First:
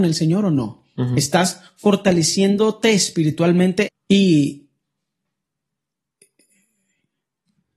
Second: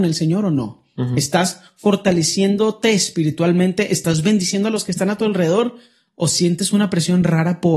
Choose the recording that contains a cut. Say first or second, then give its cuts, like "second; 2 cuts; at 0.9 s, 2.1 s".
first; 1 cut; at 3.9 s